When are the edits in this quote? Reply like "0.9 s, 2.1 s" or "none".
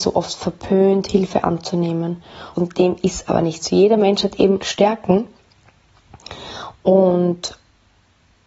2.5 s, 4.6 s, 6.7 s

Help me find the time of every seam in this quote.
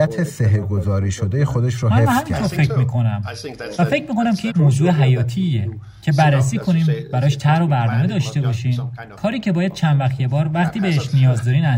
4.5 s

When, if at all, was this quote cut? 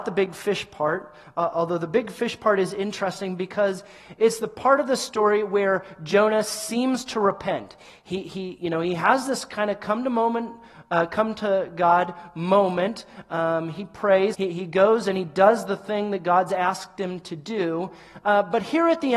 14.3 s

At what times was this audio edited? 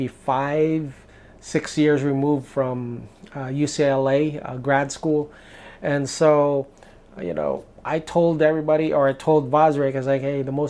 none

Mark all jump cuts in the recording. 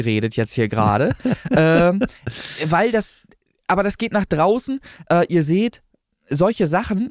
none

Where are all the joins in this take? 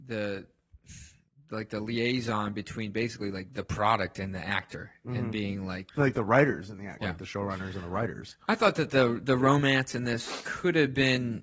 5.9 s, 7.0 s

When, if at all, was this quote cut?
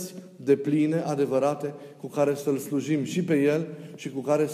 none

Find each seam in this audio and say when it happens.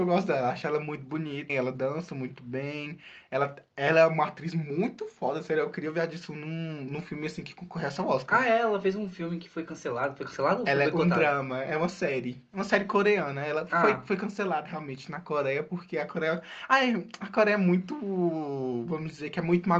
1.5 s

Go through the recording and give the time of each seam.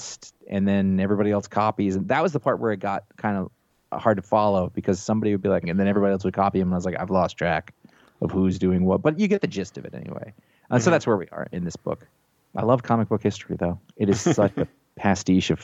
5.6 s

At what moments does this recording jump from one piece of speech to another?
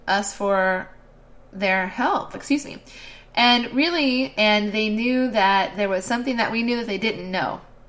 2.3 s, 4.3 s

